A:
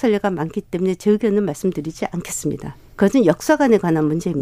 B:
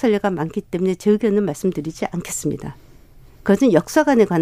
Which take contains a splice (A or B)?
A